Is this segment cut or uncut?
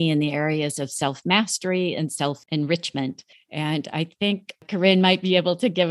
cut